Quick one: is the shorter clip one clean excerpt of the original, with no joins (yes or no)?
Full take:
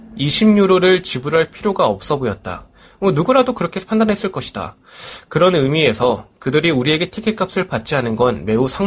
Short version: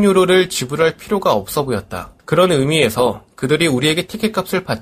no